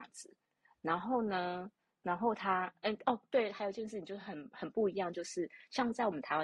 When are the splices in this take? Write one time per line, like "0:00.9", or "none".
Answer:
none